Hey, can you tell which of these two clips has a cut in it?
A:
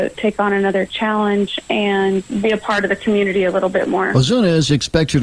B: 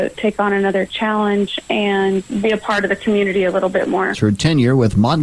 B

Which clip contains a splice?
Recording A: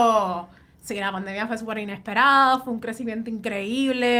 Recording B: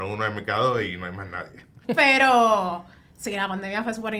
B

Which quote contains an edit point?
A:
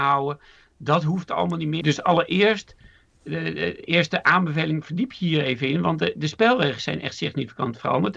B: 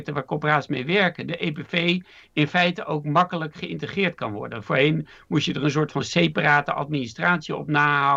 A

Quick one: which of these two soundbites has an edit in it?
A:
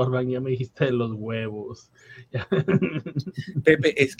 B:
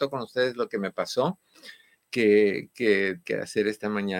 B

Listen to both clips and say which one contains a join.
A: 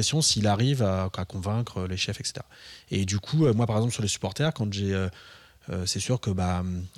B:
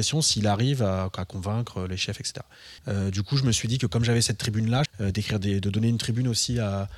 B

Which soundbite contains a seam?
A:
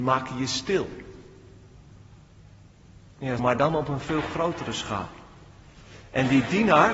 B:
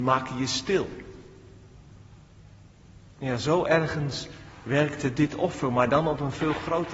A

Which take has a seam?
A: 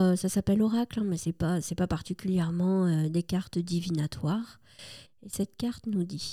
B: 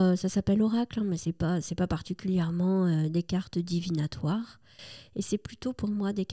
A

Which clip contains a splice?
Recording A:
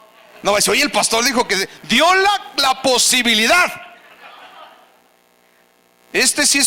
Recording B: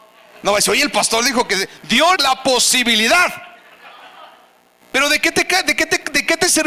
B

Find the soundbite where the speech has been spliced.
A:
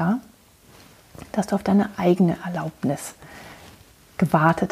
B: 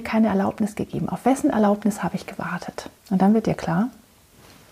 B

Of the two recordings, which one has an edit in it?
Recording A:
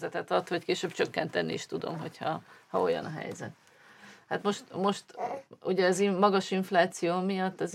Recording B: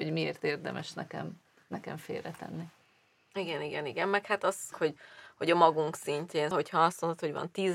B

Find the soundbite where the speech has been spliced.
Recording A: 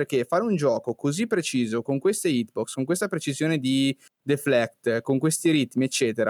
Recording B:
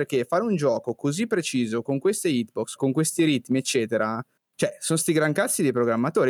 B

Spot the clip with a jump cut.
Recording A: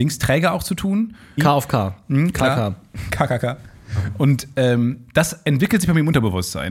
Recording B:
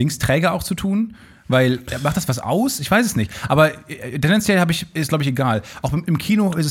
A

